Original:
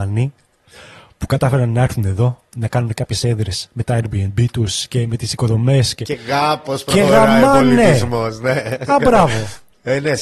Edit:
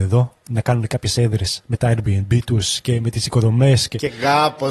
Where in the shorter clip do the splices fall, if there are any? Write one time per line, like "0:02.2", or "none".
none

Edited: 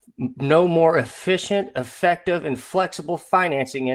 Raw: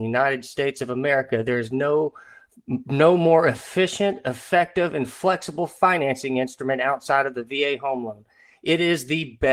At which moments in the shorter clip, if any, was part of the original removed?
none

